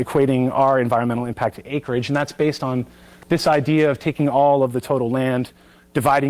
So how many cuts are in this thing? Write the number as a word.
zero